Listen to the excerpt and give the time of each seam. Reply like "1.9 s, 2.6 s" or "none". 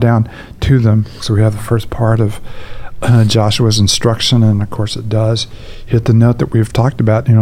1.2 s